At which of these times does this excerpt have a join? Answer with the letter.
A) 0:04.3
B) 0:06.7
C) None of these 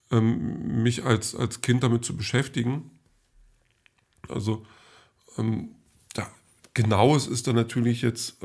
A